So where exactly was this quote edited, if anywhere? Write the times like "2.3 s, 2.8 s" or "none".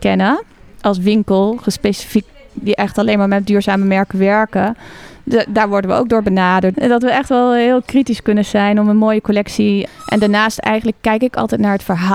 6.7 s, 9.9 s